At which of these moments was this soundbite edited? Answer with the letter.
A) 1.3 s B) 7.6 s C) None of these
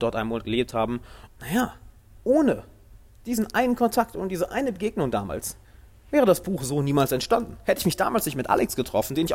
A